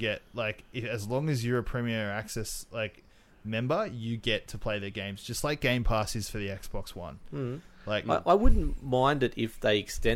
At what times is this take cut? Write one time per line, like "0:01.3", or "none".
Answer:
none